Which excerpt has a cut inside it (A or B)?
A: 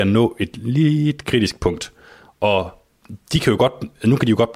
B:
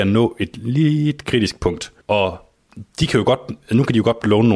B